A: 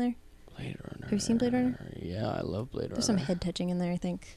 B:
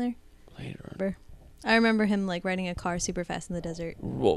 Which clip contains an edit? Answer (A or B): B